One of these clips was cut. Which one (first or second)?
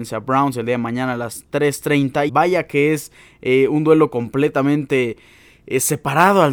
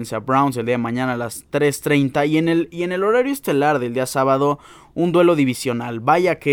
first